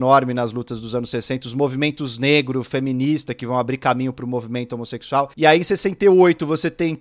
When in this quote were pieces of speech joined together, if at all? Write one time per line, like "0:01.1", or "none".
0:05.3